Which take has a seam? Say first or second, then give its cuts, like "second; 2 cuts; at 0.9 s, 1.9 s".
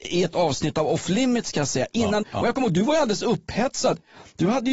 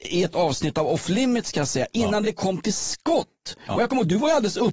first; 1 cut; at 2.2 s